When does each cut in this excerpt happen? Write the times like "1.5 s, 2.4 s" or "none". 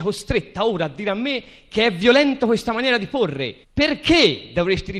3.6 s